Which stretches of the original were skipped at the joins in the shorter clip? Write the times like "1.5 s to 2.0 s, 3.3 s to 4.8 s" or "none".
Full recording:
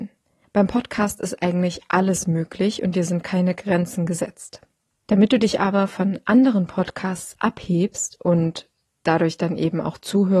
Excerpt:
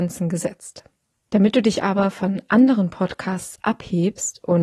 none